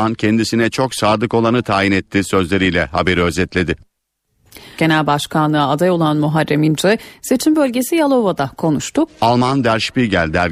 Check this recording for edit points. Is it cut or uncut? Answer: cut